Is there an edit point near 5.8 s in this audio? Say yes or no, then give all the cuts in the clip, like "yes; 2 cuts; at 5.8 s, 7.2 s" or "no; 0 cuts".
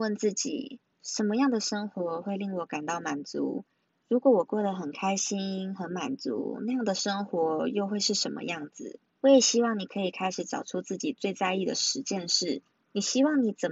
no; 0 cuts